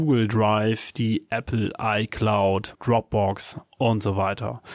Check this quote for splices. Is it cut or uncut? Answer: cut